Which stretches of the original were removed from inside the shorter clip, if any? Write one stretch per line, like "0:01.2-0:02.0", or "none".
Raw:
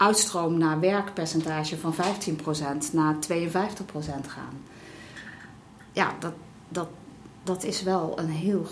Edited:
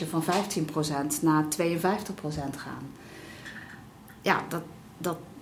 none

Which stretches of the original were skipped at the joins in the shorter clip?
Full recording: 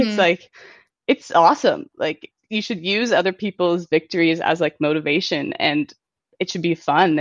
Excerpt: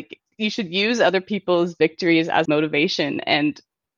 0:04.6-0:04.8

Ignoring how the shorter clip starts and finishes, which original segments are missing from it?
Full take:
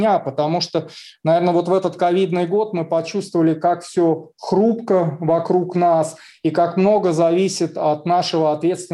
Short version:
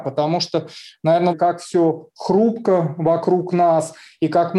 0:01.5-0:03.5

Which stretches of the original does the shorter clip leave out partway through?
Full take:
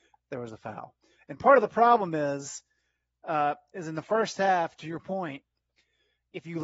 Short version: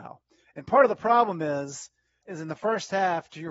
0:02.9-0:03.7

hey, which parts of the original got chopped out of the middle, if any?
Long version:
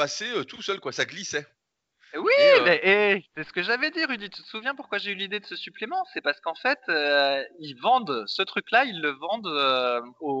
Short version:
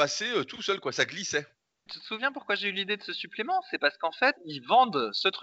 0:01.9-0:04.3
0:06.8-0:07.5

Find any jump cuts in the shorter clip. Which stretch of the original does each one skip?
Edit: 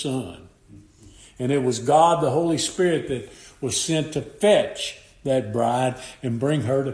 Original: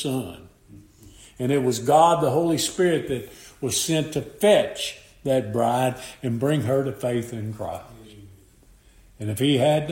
none

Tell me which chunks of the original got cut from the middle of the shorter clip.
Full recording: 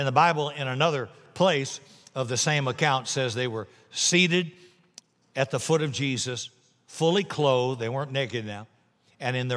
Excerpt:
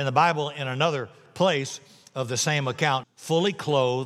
0:03.0-0:06.7

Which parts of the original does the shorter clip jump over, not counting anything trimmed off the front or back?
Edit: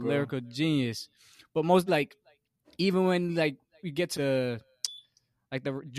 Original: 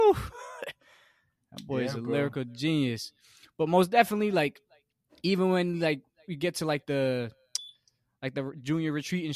0:03.9-0:04.3
0:06.6-0:06.8

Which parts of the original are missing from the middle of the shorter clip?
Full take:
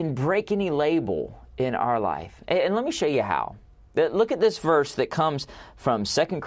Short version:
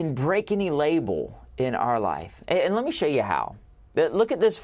none

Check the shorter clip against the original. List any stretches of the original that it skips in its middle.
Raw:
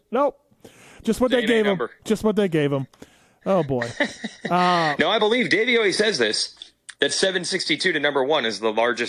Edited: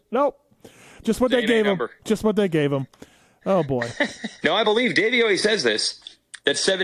0:04.4-0:05.0

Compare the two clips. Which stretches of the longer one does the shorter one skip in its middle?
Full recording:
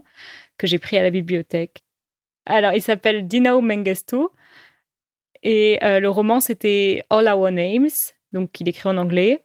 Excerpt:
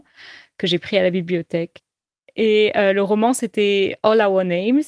0:02.2-0:05.3

